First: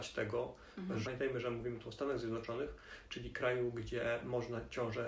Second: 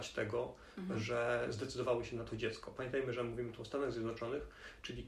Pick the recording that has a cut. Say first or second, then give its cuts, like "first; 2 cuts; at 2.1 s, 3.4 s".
first; 1 cut; at 1.0 s